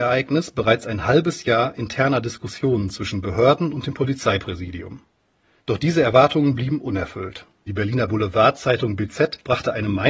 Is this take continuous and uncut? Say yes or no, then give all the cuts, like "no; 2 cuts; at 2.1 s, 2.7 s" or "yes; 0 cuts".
no; 2 cuts; at 5.6 s, 7.7 s